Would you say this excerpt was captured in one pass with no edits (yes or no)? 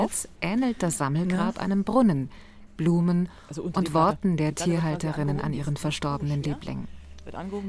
no